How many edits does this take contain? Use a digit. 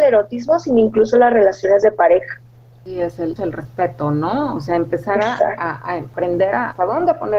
1